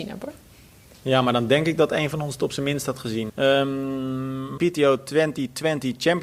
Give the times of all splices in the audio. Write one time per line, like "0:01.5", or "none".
0:03.3
0:04.6